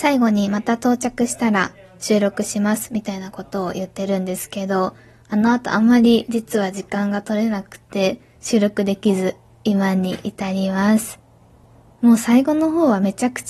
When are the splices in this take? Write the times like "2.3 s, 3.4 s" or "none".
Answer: none